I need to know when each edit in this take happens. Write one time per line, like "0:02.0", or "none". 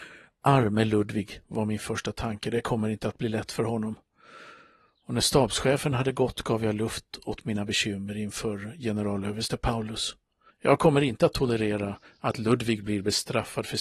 0:10.5